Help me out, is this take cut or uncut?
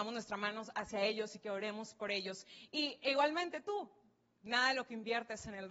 uncut